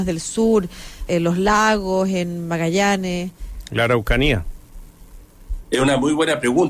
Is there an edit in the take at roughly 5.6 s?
no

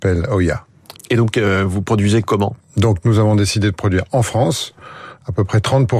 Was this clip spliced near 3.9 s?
no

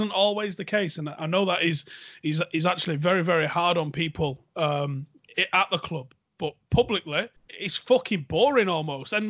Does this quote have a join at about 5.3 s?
yes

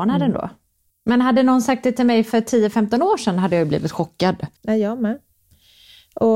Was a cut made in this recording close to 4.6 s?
yes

